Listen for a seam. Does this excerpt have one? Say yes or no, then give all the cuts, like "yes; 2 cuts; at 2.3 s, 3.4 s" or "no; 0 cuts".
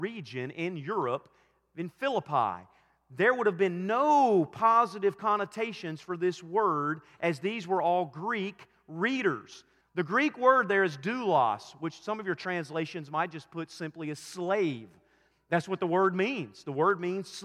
yes; 1 cut; at 9.8 s